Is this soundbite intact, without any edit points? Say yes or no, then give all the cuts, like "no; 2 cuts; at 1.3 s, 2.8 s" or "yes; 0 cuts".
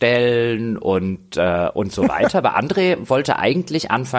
yes; 0 cuts